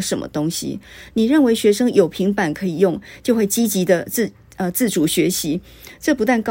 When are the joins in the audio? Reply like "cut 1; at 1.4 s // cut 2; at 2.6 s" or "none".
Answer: none